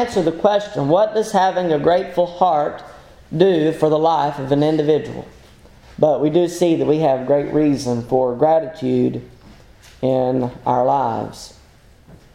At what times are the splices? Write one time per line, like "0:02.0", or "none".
0:05.8

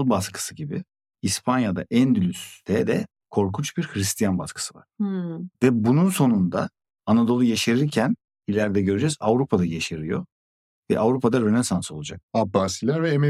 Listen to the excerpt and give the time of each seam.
0:05.5
0:12.2

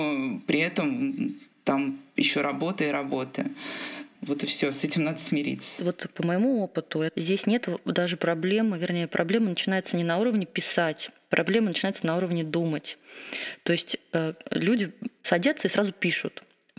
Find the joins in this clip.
0:04.2

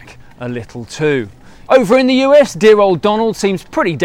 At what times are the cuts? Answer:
0:01.7

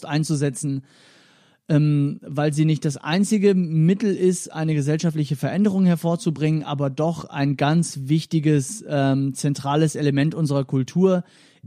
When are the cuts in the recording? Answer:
none

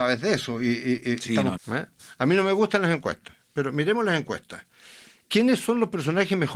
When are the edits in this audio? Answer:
0:01.6

